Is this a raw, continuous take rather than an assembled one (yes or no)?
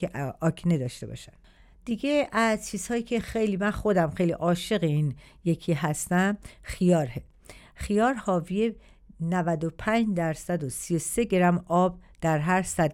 yes